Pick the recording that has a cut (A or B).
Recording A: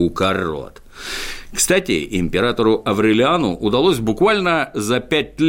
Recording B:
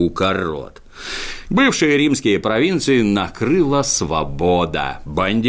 B